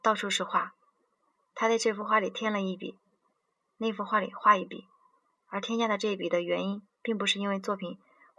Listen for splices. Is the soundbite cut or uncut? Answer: uncut